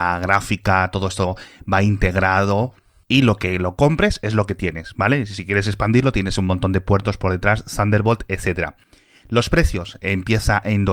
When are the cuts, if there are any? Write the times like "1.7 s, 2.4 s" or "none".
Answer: none